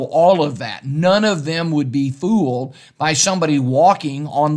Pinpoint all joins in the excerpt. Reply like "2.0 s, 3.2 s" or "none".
none